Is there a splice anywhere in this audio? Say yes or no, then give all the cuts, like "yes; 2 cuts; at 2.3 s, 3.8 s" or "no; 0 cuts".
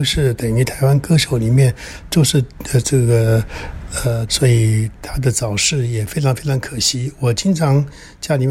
yes; 1 cut; at 4.3 s